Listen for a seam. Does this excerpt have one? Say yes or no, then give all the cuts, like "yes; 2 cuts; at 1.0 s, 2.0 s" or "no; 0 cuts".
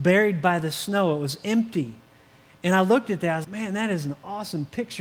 yes; 1 cut; at 3.4 s